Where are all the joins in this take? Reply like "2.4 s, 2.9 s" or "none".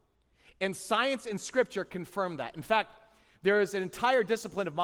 none